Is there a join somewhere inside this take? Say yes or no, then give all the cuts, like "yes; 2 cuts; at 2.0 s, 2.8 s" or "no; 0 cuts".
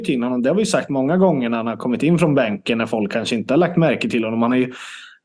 no; 0 cuts